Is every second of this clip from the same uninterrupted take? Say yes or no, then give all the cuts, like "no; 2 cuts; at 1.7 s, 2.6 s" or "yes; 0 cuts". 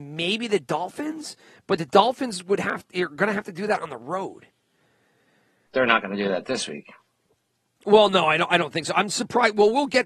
no; 1 cut; at 5.7 s